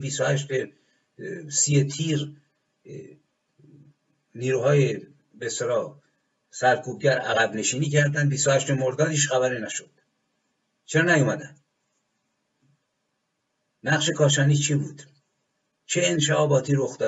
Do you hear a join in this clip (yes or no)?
no